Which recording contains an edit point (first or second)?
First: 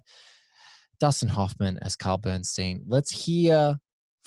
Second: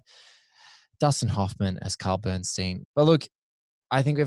second